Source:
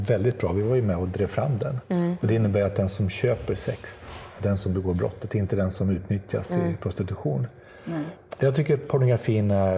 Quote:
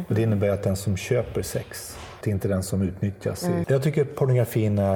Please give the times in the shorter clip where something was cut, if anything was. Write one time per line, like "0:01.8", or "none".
0:02.2
0:03.6